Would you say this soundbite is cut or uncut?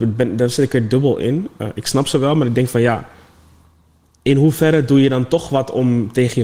uncut